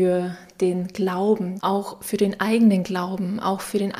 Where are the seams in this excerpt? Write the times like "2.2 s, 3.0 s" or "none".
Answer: 1.6 s